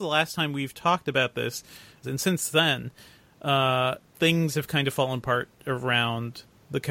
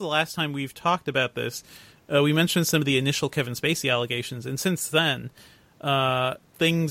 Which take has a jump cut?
first; 1 cut; at 2.0 s

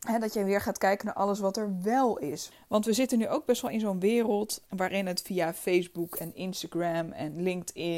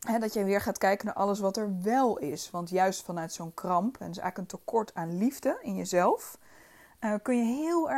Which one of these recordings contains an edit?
first; 2 cuts; at 2.5 s, 4.7 s

